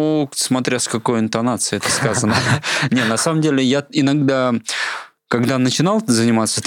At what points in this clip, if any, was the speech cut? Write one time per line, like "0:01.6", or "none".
none